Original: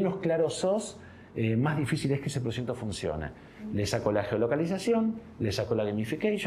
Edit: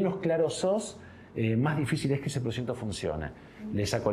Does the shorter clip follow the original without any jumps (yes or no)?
yes